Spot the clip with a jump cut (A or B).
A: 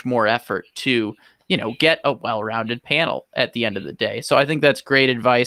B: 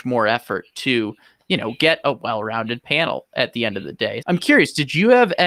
B